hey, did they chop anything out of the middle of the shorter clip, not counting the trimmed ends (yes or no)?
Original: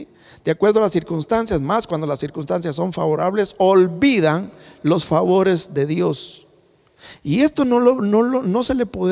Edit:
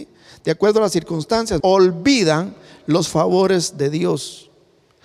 yes